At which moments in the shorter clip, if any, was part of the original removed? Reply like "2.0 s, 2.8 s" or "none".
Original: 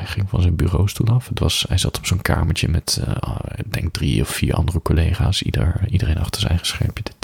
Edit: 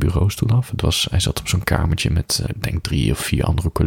2.5 s

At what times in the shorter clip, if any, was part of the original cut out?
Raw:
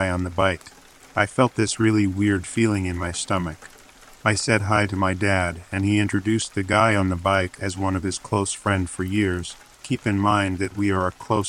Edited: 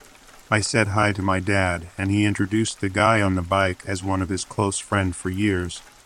none

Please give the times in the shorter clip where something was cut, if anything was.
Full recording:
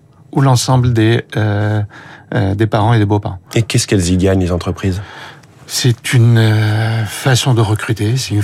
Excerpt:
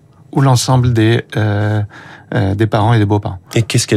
none

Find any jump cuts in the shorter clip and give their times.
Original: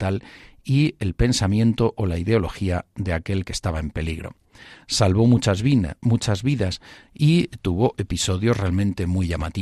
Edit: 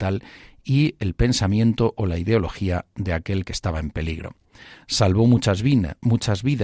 none

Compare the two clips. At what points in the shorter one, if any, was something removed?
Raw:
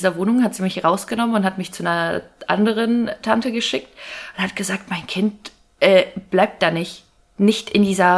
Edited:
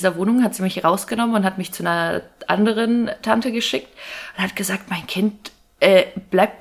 none

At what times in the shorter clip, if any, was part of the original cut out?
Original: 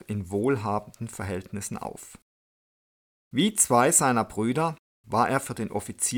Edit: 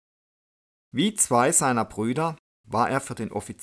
none

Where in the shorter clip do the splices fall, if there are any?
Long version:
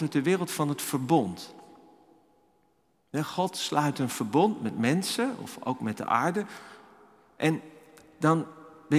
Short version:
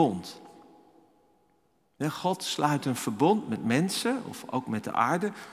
none

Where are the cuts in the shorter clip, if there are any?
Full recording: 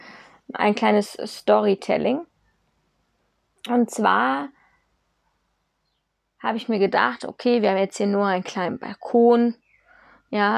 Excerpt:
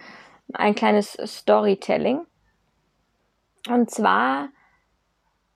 none

